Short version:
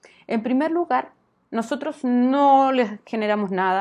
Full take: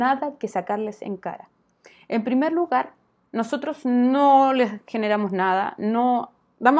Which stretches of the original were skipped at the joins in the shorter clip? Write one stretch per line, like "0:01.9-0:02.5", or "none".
none